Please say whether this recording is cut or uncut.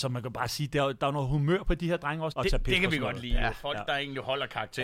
cut